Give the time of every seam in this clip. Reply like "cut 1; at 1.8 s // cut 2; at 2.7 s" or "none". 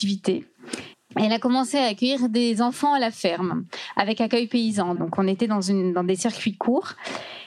cut 1; at 0.9 s // cut 2; at 5.0 s